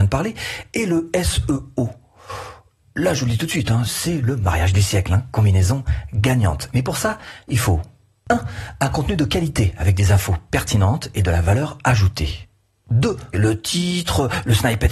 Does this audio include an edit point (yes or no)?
yes